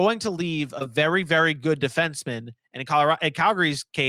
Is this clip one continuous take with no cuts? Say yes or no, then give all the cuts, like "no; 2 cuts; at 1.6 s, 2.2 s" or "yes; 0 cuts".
yes; 0 cuts